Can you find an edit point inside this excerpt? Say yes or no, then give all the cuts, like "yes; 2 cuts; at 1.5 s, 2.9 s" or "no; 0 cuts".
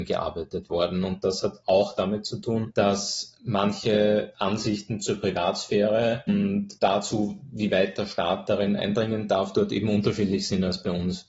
no; 0 cuts